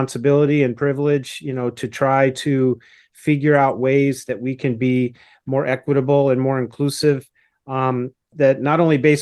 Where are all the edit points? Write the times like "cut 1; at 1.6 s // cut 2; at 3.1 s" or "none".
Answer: cut 1; at 8.3 s